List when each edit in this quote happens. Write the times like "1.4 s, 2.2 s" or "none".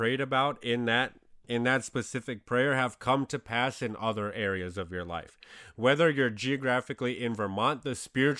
none